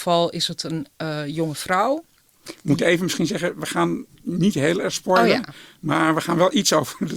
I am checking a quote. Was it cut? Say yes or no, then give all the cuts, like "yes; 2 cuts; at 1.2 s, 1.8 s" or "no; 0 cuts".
no; 0 cuts